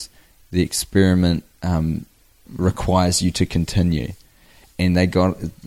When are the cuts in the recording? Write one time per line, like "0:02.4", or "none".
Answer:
0:02.4